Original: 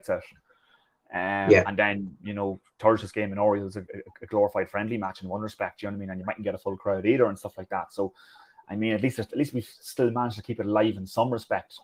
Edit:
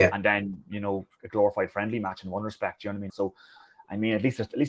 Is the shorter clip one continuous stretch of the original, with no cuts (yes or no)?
no